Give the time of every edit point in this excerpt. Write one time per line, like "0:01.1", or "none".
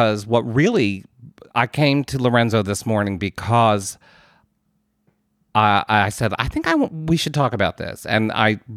none